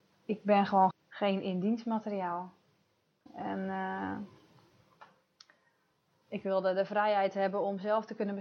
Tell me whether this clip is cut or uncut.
cut